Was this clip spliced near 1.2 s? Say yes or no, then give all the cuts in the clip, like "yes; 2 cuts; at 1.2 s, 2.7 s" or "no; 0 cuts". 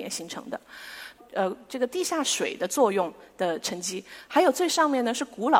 yes; 1 cut; at 1.2 s